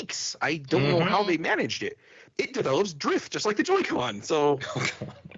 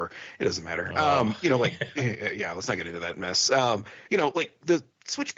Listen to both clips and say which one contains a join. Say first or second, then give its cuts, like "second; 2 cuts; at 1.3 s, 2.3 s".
first; 1 cut; at 2.3 s